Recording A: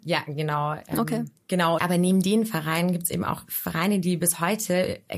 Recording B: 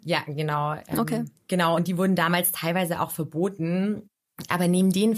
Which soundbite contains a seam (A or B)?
A